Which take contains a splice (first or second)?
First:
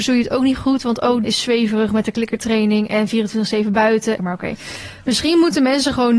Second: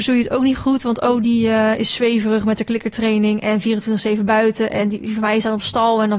first